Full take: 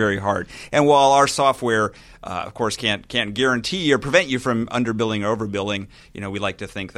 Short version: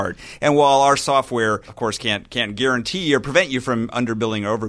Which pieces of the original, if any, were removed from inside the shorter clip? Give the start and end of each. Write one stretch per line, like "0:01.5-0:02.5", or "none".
0:02.0-0:02.5